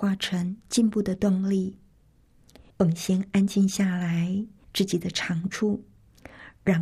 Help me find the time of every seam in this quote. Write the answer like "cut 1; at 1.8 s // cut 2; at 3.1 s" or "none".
cut 1; at 2.7 s // cut 2; at 4.6 s